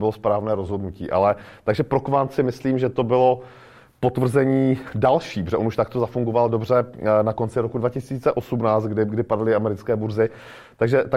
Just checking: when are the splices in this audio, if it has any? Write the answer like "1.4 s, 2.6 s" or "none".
none

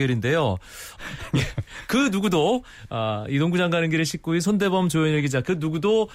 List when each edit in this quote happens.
1.0 s

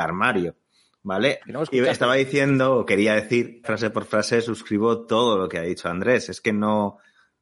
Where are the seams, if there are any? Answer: 1.4 s, 3.6 s

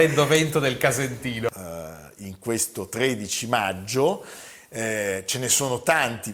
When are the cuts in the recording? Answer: 1.5 s

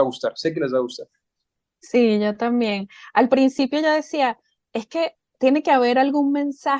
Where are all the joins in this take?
none

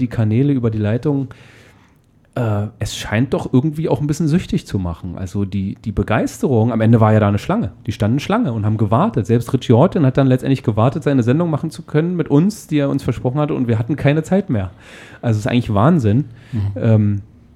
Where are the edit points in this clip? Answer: none

